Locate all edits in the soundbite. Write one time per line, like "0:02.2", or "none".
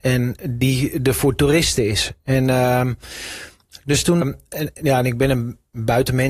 0:04.2